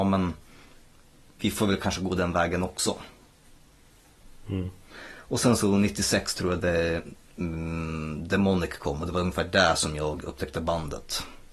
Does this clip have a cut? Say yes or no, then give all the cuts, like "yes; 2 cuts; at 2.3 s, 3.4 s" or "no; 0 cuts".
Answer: no; 0 cuts